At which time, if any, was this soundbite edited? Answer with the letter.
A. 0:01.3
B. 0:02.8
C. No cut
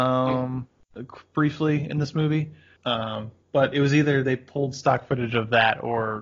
B